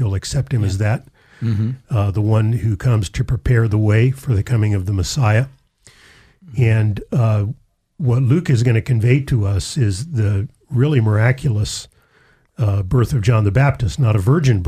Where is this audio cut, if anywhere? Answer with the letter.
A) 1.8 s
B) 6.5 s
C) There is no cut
C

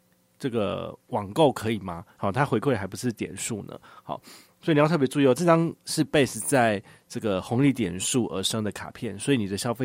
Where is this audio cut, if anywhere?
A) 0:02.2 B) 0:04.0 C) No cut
A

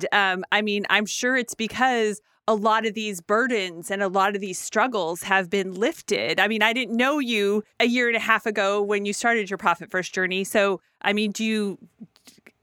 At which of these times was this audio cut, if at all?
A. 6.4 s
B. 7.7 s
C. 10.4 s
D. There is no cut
B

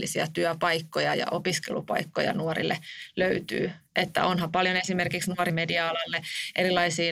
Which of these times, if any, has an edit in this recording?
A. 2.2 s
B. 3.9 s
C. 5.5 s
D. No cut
C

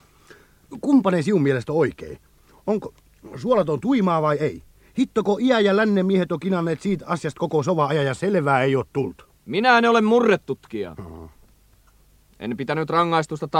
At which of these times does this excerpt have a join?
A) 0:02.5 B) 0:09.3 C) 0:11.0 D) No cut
C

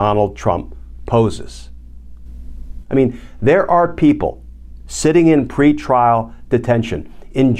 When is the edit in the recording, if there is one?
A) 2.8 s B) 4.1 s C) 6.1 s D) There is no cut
A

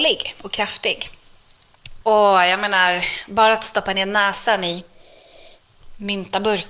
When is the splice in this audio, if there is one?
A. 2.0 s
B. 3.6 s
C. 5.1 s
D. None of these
A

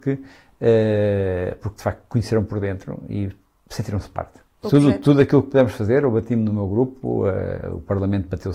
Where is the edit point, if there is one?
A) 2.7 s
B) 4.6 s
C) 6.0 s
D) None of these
B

